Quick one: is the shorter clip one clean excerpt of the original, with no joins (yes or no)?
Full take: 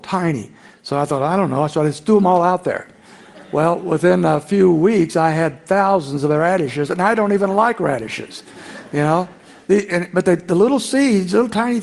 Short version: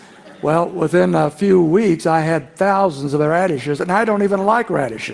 yes